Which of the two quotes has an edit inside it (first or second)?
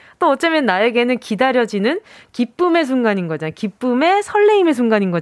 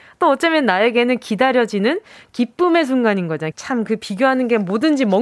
second